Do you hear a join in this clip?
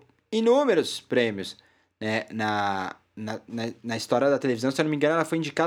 no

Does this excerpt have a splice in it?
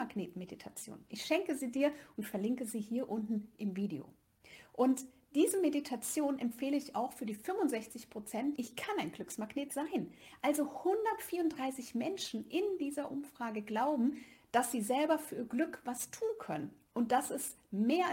yes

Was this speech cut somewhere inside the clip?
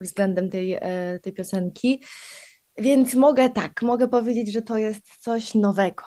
no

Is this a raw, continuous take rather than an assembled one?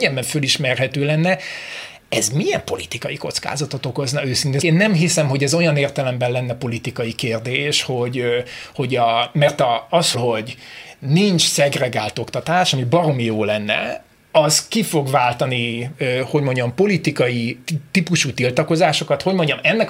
no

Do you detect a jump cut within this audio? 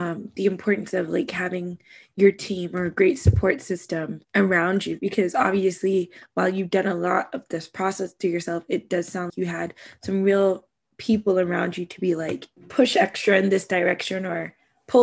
yes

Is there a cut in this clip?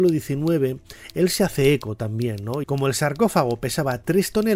yes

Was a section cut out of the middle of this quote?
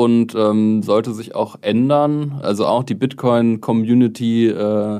yes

